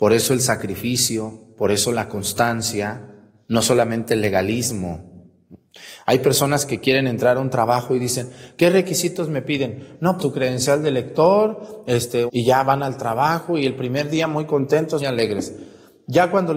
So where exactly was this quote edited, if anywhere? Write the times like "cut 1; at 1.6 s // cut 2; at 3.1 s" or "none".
cut 1; at 10.2 s // cut 2; at 12.3 s // cut 3; at 15.0 s